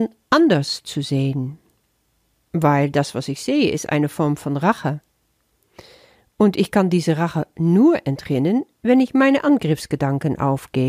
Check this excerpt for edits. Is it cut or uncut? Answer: uncut